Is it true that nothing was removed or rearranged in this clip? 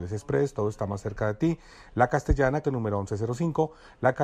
no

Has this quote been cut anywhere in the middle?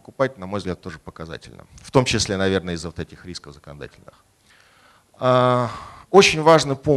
no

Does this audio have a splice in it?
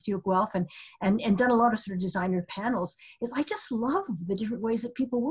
no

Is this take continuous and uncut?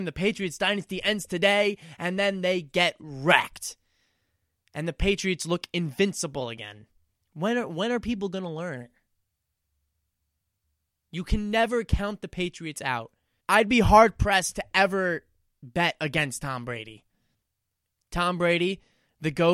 no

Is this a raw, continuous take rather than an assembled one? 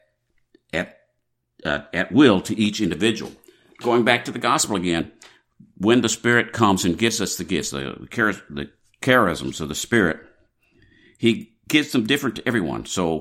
no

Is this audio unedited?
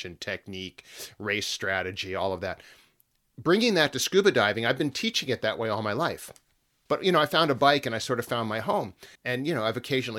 no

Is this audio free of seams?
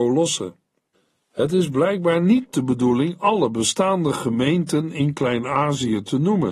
yes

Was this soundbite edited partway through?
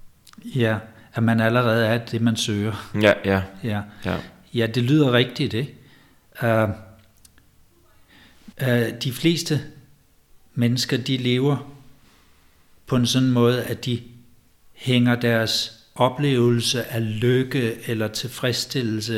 yes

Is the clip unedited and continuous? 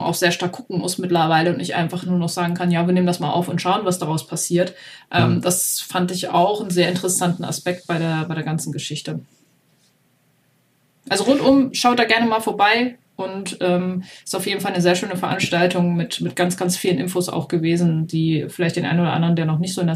yes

